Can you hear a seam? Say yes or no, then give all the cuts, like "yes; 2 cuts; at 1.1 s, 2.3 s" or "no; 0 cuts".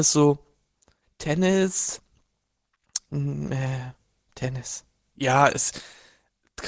yes; 3 cuts; at 1.0 s, 3.1 s, 5.1 s